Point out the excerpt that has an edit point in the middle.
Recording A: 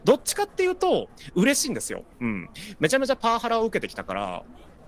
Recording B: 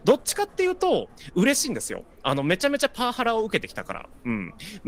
A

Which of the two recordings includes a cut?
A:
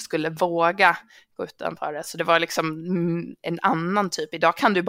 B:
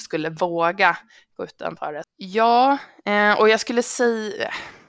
B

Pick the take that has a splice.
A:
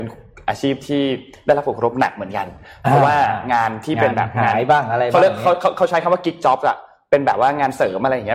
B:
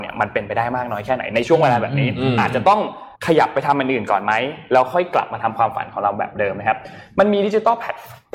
B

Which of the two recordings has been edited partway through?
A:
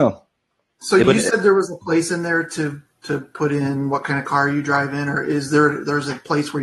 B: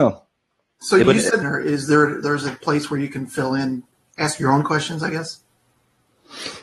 B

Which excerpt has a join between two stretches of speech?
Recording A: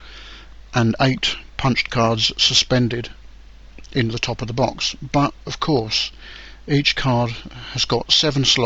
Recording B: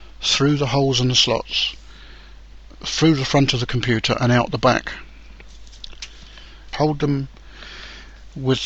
B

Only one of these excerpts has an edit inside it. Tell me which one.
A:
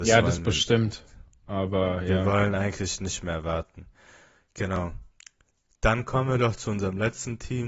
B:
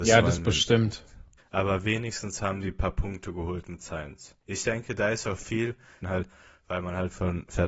B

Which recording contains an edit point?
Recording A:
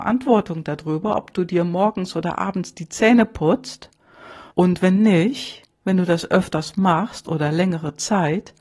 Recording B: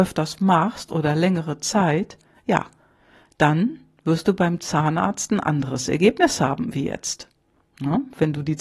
A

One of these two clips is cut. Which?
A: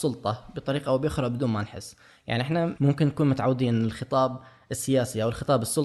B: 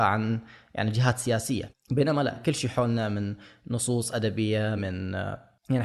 B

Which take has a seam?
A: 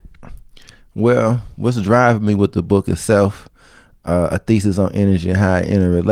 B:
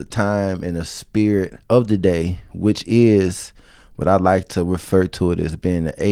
B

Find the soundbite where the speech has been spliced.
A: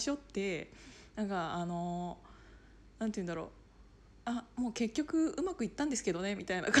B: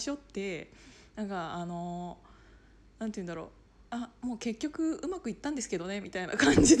B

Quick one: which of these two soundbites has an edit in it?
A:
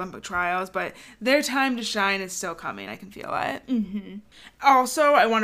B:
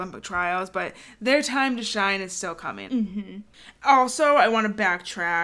B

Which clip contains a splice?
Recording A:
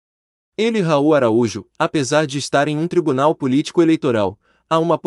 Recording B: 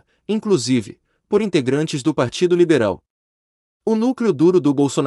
A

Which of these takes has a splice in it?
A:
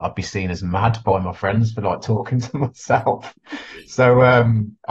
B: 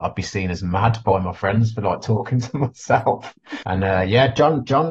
B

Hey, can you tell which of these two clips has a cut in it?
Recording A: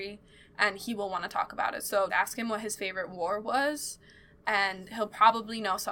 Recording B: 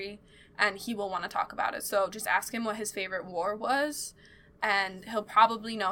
A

